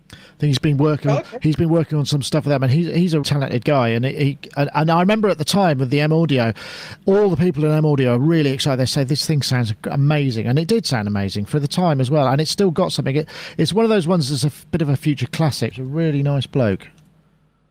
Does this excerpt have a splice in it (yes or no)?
yes